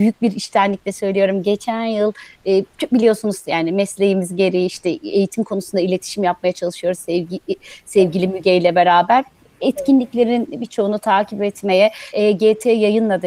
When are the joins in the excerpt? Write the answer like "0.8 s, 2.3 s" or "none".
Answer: 12.1 s